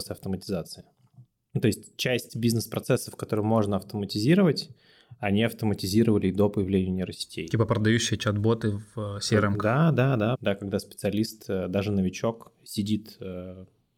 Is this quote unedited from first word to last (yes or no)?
no